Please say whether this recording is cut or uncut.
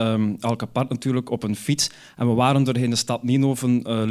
uncut